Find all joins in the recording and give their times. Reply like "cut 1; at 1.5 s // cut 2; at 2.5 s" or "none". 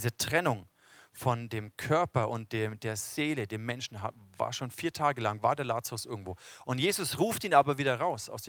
none